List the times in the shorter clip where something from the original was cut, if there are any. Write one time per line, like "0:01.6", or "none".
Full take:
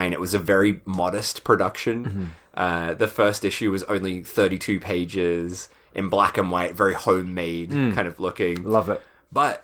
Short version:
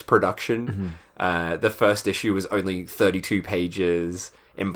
none